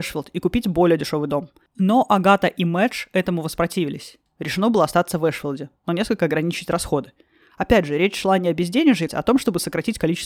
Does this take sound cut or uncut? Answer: cut